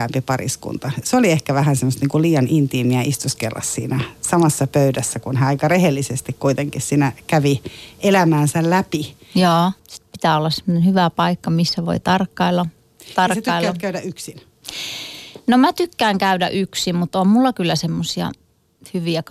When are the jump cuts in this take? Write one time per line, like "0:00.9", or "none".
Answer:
0:09.8